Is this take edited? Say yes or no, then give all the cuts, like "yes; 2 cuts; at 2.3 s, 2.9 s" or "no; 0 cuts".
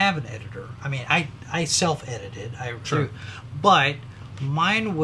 yes; 1 cut; at 2.8 s